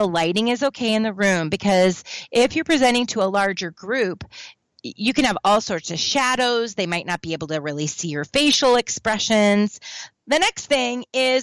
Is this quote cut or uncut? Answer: cut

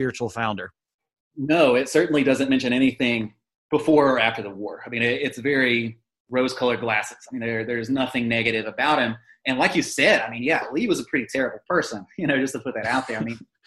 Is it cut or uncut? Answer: uncut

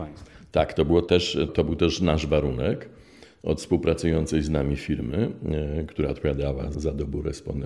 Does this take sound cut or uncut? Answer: cut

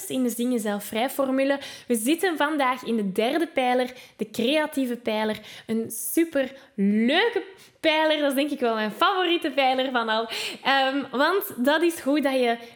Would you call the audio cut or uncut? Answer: uncut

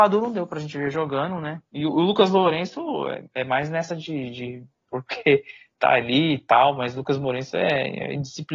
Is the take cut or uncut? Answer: uncut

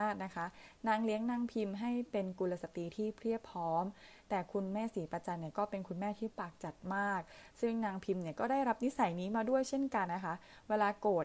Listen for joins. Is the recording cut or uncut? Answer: cut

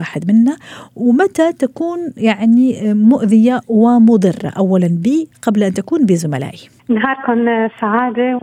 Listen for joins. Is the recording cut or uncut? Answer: cut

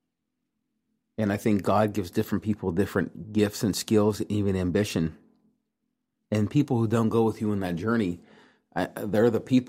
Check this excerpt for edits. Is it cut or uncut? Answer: uncut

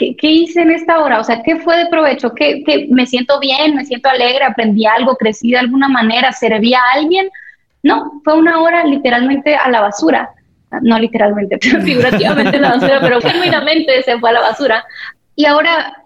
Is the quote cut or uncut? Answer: cut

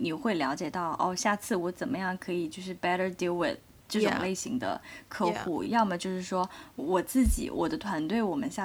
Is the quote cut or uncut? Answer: uncut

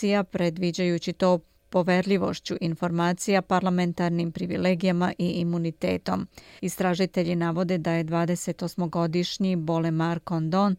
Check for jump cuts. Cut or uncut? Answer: cut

